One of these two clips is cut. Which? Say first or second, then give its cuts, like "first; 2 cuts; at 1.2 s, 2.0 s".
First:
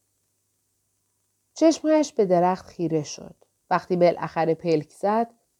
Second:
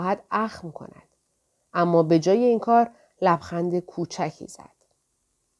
first; 1 cut; at 3.6 s